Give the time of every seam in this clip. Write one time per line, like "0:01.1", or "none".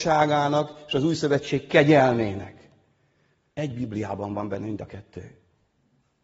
0:03.5

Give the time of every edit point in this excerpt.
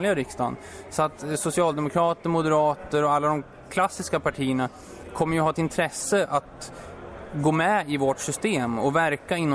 none

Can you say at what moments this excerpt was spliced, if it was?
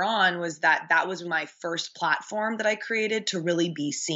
0:01.2

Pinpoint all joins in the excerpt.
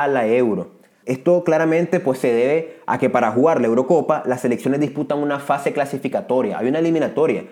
0:01.0

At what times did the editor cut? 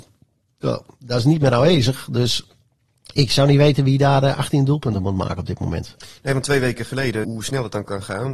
0:07.2

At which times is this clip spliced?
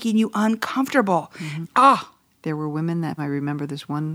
0:01.6
0:03.2

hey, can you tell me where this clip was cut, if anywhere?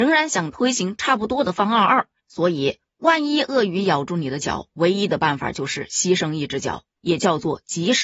0:02.2

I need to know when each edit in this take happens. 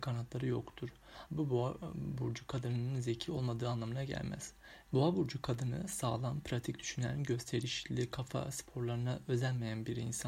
0:01.3
0:04.8

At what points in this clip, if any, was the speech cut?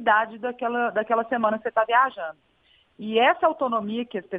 none

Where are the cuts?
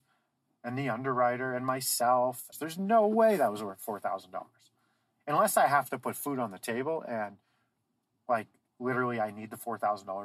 0:02.5

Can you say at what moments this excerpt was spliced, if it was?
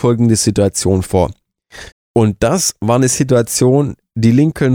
0:01.9

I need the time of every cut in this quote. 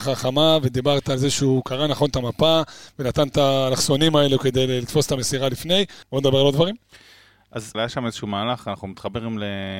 0:06.0
0:07.7

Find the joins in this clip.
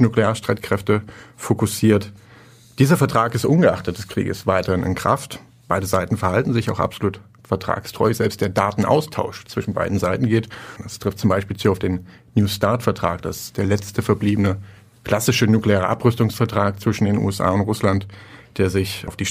0:10.8

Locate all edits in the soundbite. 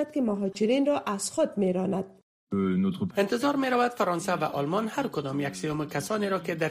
0:03.1

